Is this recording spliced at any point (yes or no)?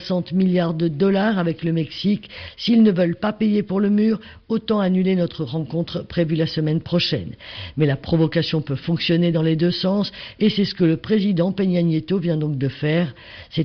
no